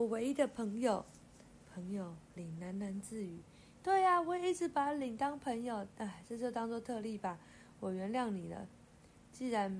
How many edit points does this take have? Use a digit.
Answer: 1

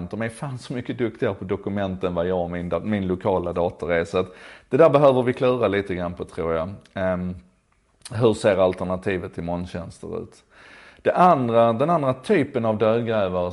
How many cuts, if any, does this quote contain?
0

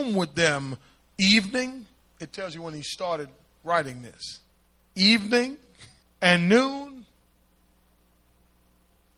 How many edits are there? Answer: 2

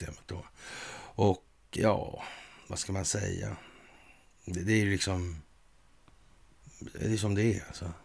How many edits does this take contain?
1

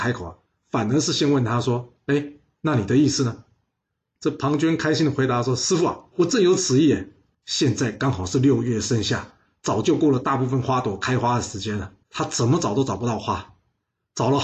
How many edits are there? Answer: 2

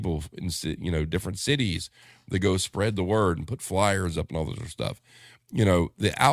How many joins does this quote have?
0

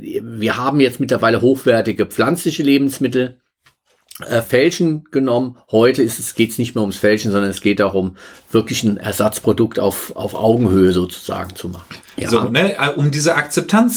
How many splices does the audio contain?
2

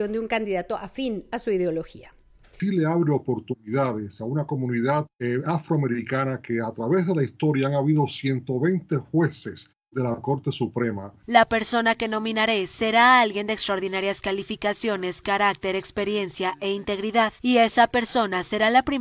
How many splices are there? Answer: 2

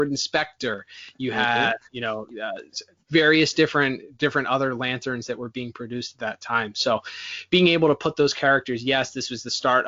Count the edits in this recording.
1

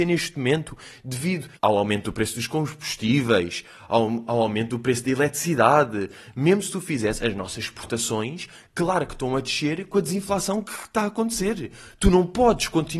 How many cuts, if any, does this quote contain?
1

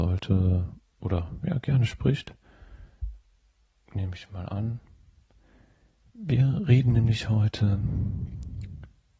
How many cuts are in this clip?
0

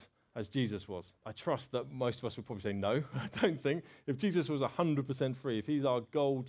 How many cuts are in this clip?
1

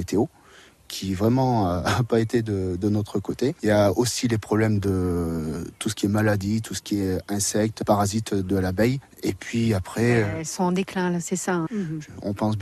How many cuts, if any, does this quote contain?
2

